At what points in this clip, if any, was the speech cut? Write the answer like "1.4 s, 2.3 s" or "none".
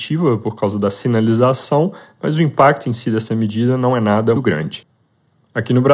4.3 s